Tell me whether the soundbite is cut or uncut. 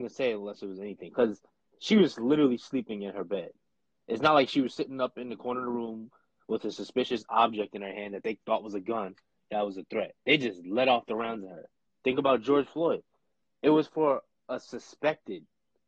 uncut